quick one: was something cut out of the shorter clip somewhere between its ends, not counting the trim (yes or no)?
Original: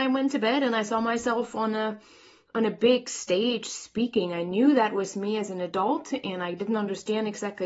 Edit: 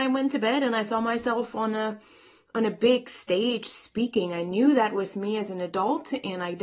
no